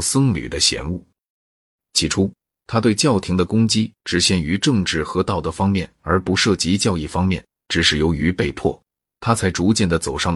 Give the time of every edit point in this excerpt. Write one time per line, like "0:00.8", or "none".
none